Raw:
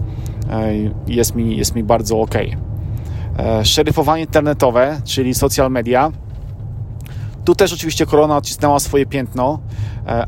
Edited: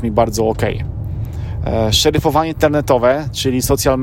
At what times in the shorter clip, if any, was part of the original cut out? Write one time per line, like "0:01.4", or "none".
none